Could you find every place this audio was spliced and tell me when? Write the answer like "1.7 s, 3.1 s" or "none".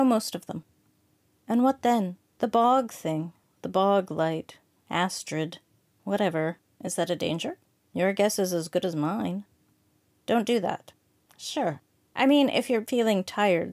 2.2 s, 6.7 s